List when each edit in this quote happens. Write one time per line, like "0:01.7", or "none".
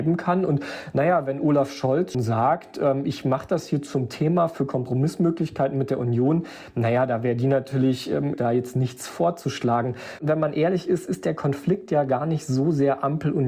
0:02.1
0:08.3